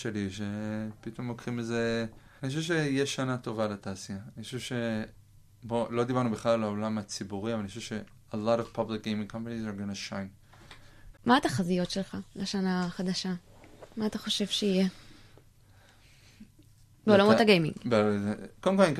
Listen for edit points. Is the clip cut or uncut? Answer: cut